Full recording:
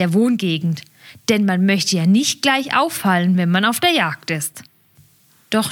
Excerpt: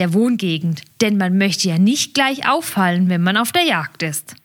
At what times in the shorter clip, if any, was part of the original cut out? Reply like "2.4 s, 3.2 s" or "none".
0.9 s